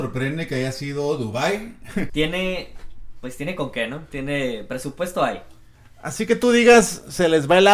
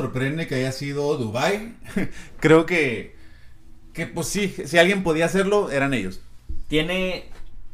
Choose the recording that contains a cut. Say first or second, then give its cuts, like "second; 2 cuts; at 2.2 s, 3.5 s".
first; 1 cut; at 2.1 s